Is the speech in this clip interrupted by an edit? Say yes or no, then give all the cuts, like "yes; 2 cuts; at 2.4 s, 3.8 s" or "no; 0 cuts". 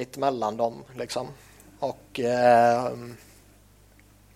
no; 0 cuts